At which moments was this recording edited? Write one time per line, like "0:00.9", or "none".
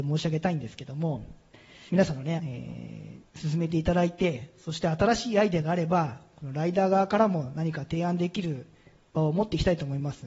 0:02.4